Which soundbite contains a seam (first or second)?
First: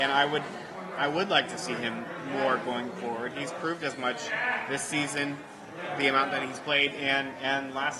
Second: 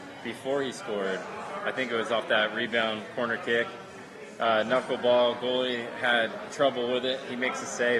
first